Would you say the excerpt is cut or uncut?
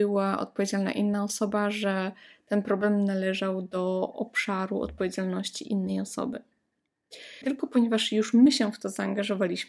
cut